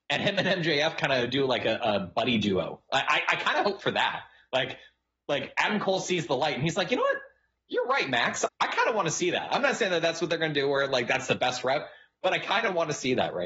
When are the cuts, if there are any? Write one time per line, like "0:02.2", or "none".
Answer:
0:08.5